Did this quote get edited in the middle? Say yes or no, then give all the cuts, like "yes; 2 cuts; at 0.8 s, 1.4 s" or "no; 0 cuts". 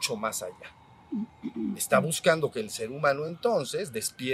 no; 0 cuts